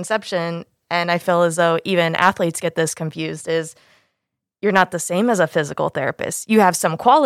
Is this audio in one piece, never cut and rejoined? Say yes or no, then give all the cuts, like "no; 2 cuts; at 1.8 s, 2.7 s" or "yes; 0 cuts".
yes; 0 cuts